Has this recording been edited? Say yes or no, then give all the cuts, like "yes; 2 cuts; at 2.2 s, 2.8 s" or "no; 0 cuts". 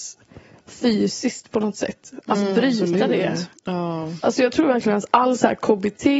no; 0 cuts